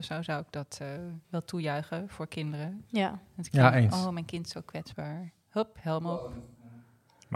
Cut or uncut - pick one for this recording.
cut